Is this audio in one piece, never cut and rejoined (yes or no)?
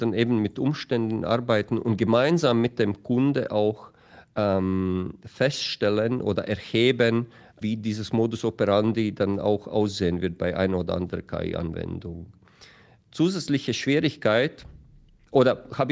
no